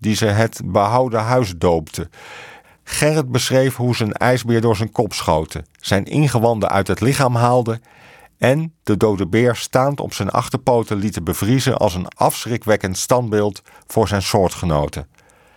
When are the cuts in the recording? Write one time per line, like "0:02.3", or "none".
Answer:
0:02.6